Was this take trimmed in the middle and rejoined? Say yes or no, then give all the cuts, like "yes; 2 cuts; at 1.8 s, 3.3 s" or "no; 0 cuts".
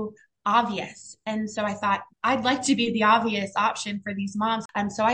yes; 1 cut; at 2.1 s